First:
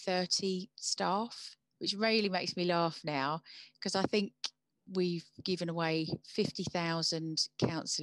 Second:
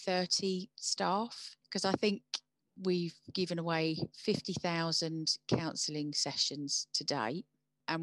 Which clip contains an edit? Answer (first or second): second